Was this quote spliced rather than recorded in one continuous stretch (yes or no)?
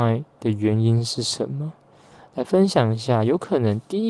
no